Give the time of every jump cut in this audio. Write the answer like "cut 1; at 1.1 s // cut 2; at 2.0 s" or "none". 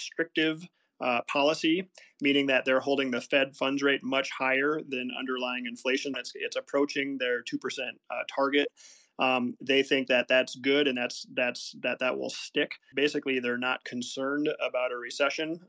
cut 1; at 6.1 s // cut 2; at 12.9 s